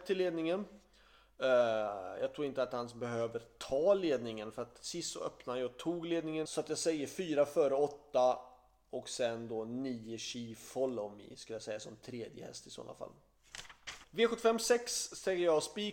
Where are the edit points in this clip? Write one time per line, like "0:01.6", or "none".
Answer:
0:06.5
0:14.0